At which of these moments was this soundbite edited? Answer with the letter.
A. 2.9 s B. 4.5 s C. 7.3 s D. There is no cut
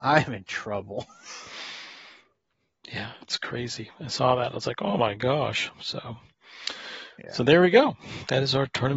D